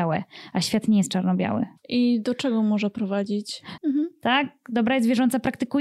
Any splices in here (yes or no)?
yes